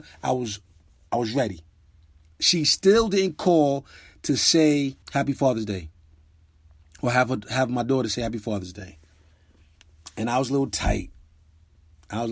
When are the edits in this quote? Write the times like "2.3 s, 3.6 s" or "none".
2.3 s, 5.0 s